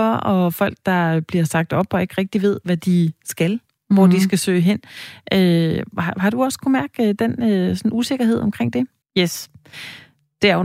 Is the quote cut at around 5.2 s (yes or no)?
no